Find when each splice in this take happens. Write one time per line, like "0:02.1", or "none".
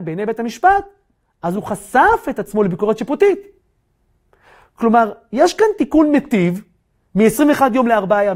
none